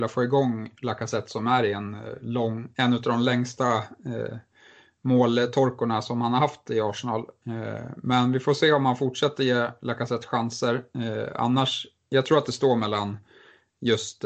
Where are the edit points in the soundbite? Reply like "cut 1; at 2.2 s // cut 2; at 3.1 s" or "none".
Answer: none